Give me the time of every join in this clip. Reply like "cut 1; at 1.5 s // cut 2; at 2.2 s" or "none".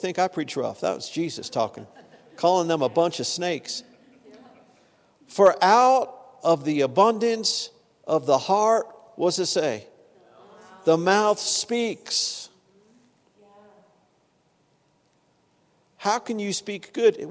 none